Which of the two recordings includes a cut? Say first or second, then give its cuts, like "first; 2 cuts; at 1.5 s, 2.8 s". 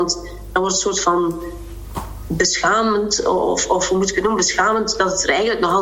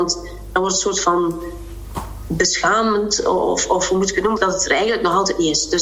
second; 1 cut; at 4.4 s